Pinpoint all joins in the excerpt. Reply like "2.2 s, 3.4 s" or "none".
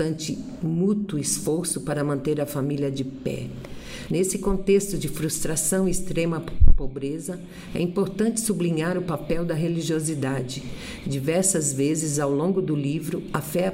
4.1 s